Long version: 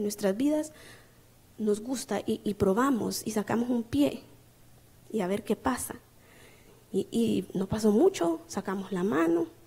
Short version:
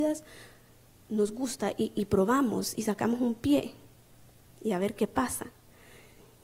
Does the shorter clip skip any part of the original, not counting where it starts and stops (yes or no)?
no